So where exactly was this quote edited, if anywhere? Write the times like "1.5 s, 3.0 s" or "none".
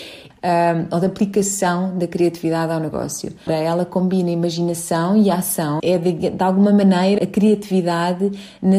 3.5 s, 5.8 s, 7.2 s